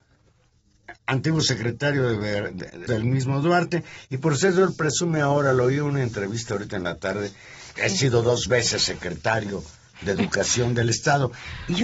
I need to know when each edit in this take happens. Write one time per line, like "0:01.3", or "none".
0:02.9
0:07.8